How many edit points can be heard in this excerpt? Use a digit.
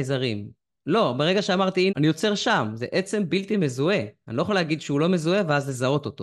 1